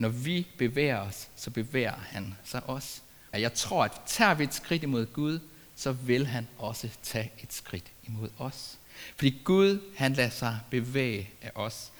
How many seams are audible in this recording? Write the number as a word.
one